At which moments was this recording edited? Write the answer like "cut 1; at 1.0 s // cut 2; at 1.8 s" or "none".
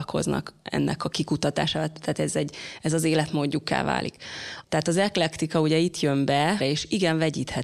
cut 1; at 4.6 s // cut 2; at 6.6 s